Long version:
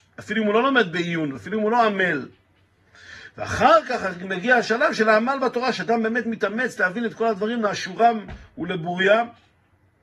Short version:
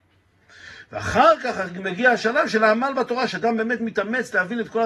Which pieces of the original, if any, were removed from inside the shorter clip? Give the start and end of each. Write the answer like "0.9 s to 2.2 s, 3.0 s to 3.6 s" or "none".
none